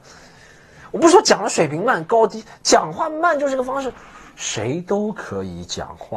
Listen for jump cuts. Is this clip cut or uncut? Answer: uncut